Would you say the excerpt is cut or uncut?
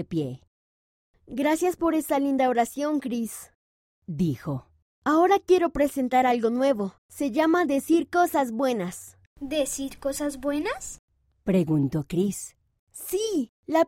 cut